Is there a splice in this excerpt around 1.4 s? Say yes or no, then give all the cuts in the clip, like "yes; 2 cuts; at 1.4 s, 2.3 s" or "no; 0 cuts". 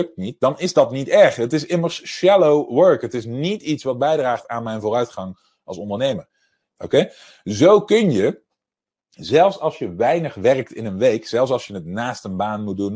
no; 1 cut; at 6.7 s